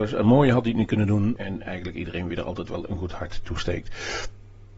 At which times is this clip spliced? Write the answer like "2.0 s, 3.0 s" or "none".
1.4 s